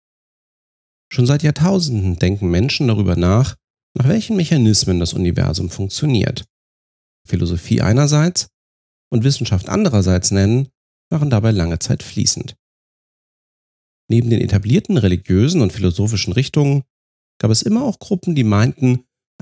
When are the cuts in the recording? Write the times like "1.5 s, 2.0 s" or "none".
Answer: 7.3 s